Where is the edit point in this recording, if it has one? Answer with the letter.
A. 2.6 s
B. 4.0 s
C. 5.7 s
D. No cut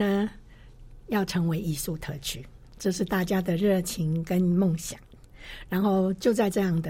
D